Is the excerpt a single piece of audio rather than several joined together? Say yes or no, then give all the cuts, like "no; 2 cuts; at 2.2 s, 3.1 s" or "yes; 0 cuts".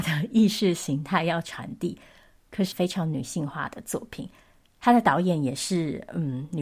no; 1 cut; at 2.7 s